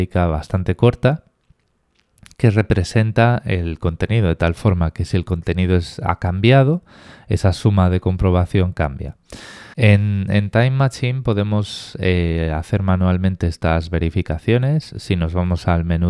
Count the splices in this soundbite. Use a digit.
1